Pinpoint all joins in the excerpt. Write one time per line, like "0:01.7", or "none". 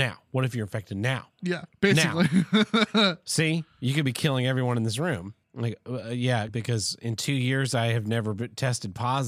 0:05.4
0:06.5